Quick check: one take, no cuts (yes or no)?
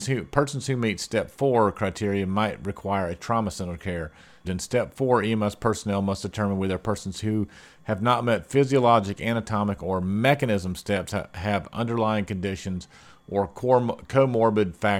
no